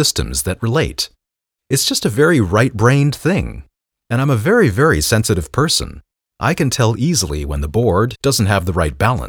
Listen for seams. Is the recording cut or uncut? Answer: cut